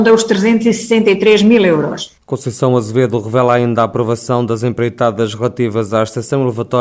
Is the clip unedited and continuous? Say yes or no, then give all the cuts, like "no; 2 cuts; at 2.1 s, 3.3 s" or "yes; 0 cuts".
yes; 0 cuts